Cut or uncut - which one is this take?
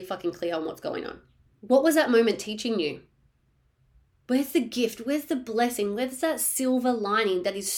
cut